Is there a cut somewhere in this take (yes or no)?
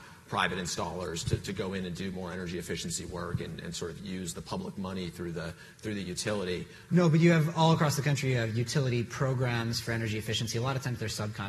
yes